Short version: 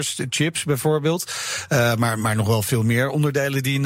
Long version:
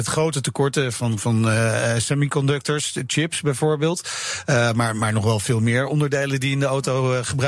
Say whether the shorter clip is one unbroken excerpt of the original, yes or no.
yes